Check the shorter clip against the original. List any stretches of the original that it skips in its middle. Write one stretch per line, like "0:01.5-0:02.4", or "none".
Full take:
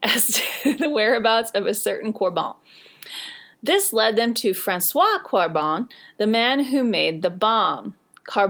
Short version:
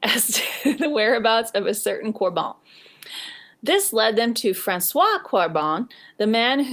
none